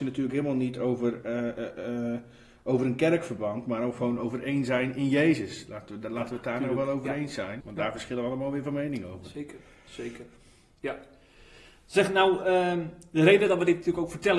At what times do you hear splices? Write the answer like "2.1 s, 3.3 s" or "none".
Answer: 7.6 s